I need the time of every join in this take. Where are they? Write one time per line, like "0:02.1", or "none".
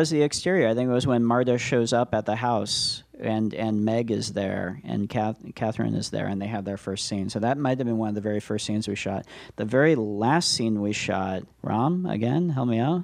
0:11.5